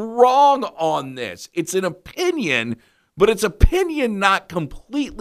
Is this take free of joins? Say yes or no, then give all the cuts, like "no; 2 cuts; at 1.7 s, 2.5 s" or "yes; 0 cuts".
yes; 0 cuts